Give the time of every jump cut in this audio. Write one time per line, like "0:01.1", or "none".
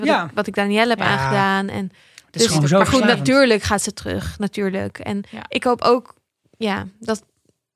none